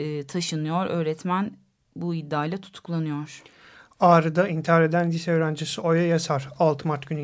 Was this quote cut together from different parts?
no; 0 cuts

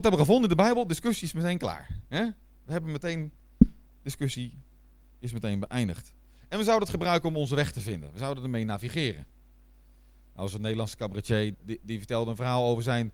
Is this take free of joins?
no; 1 cut; at 11.5 s

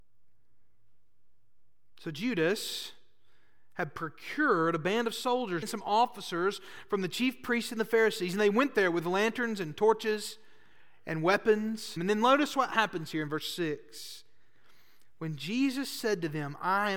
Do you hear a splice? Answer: yes; 2 cuts; at 5.6 s, 12.0 s

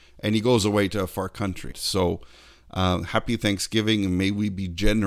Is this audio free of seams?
no; 1 cut; at 1.7 s

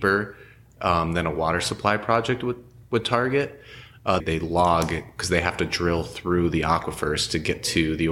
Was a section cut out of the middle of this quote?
yes; 1 cut; at 4.2 s

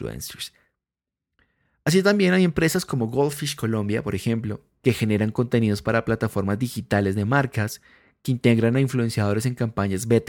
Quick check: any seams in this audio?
yes; 1 cut; at 4.8 s

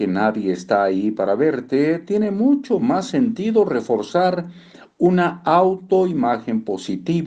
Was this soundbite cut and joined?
no; 0 cuts

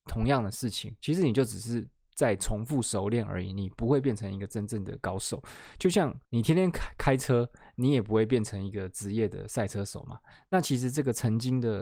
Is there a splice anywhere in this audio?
yes; 1 cut; at 6.2 s

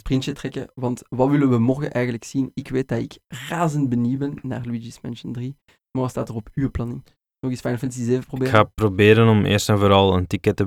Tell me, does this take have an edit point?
no; 0 cuts

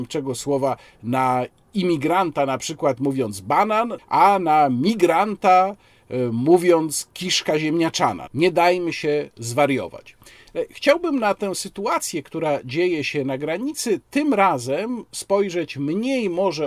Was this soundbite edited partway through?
yes; 1 cut; at 4.0 s

